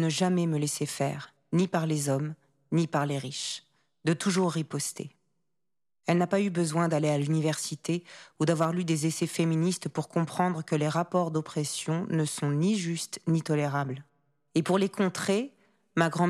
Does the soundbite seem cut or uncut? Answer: uncut